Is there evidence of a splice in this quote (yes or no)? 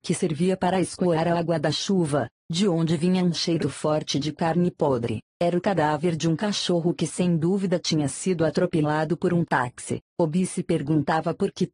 yes